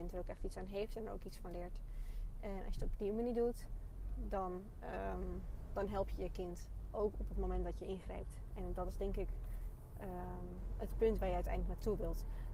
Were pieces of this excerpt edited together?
no; 0 cuts

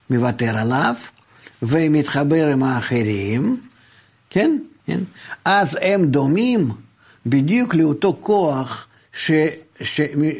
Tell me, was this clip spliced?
yes; 1 cut; at 4.8 s

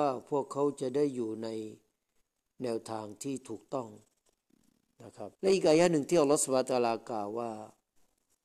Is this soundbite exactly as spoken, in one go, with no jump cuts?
no; 1 cut; at 5.3 s

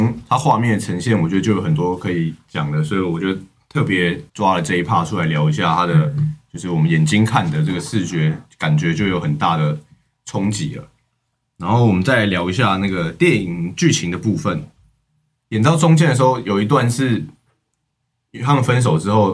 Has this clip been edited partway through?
yes; 2 cuts; at 4.3 s, 15.4 s

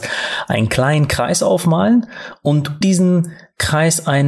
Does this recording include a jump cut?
yes; 1 cut; at 2.8 s

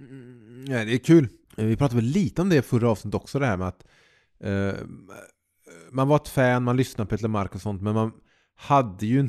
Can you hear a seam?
yes; 1 cut; at 1.4 s

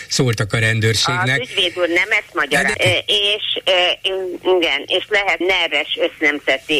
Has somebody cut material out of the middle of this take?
yes; 2 cuts; at 2.7 s, 5.4 s

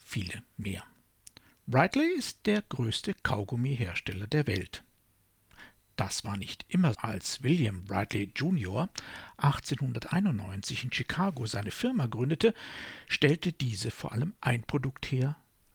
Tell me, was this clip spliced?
yes; 1 cut; at 6.9 s

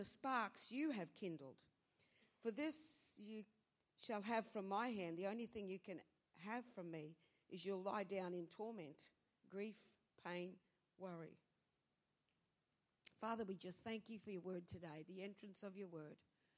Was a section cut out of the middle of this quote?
no; 0 cuts

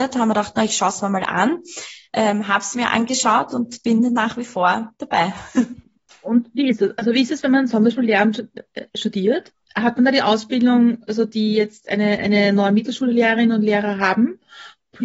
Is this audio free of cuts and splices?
yes; 0 cuts

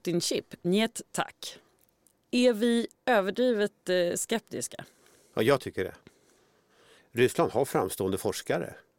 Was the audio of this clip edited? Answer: no; 0 cuts

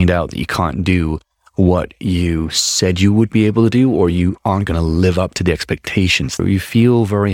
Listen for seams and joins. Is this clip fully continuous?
no; 1 cut; at 6.4 s

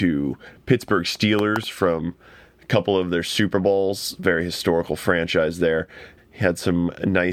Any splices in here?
yes; 1 cut; at 6.2 s

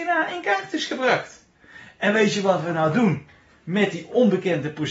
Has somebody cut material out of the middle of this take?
no; 0 cuts

